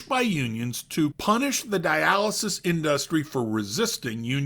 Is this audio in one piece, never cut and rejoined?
no; 1 cut; at 1.1 s

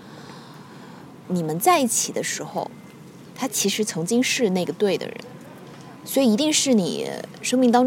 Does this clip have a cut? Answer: yes; 1 cut; at 1.2 s

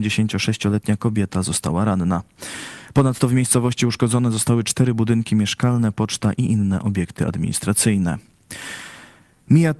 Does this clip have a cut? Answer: no; 0 cuts

